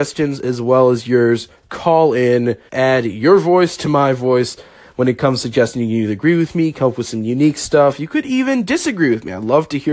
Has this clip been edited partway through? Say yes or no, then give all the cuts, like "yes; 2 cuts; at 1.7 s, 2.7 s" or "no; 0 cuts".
yes; 1 cut; at 2.7 s